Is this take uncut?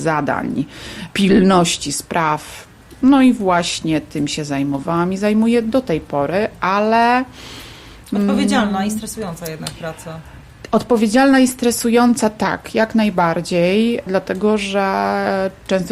yes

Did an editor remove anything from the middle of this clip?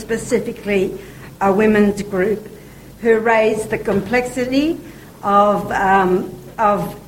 no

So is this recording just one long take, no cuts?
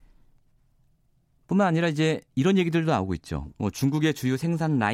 no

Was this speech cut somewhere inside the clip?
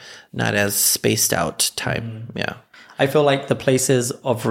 no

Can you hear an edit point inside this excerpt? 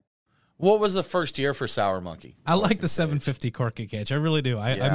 yes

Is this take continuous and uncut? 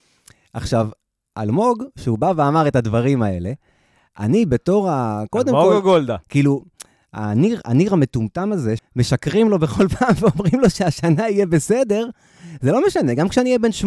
no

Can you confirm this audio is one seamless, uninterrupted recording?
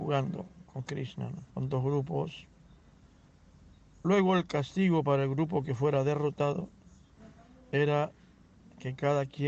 no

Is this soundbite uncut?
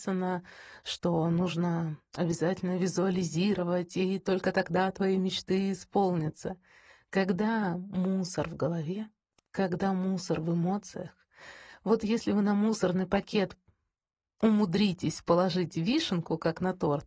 yes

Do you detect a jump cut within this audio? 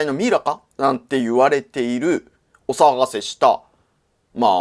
no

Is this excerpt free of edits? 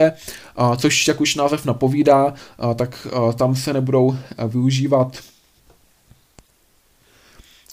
yes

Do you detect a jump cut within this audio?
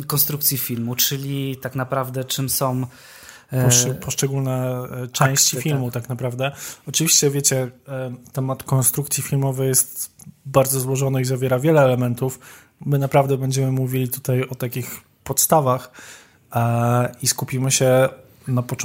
no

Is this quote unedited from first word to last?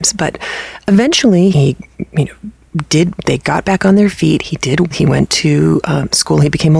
no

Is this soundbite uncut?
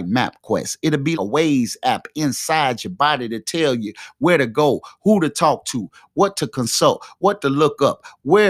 no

